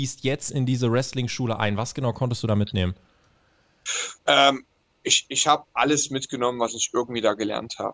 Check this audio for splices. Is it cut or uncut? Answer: uncut